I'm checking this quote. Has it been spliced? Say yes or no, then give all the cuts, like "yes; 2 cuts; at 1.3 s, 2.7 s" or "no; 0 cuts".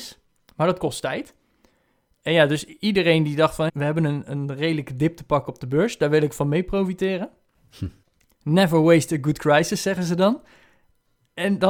yes; 1 cut; at 3.7 s